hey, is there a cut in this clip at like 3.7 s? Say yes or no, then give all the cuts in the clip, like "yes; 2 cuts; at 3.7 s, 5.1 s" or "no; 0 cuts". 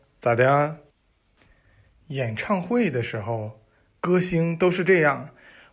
no; 1 cut; at 0.9 s